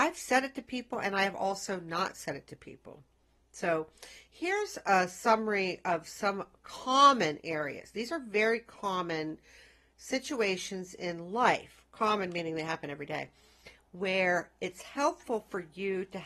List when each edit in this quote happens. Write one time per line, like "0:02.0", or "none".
none